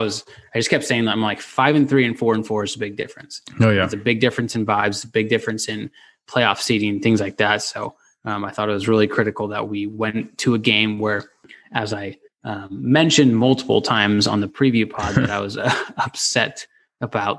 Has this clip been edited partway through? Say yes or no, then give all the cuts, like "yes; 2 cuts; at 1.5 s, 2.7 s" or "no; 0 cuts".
no; 0 cuts